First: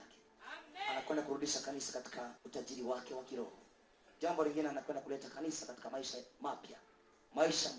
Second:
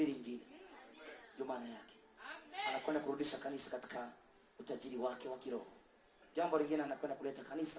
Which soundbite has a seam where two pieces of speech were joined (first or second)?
first